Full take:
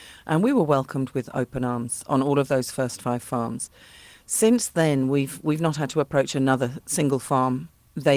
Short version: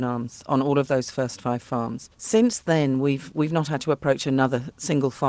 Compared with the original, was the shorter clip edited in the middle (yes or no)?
yes